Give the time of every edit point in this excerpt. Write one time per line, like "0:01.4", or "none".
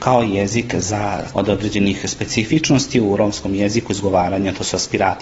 0:01.3